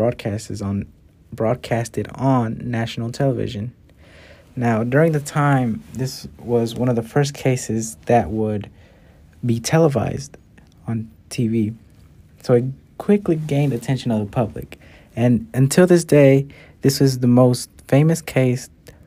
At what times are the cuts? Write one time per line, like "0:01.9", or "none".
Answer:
none

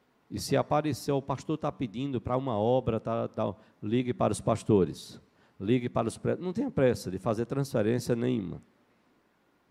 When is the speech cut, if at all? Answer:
none

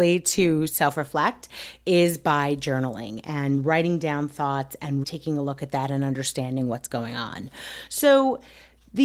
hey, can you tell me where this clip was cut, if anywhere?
0:05.0

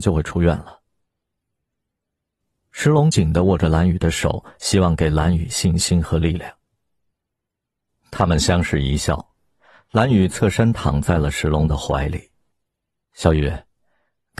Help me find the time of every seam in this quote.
0:03.1
0:13.0

